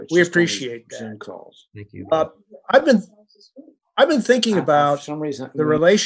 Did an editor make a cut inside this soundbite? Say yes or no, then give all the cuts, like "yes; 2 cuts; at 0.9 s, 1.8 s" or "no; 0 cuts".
no; 0 cuts